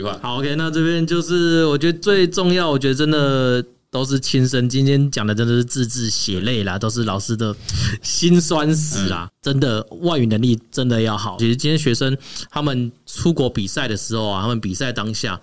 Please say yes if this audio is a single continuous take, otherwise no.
no